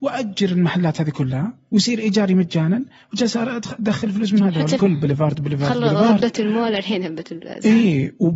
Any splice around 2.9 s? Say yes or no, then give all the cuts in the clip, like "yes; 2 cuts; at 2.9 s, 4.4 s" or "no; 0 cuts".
no; 1 cut; at 4.8 s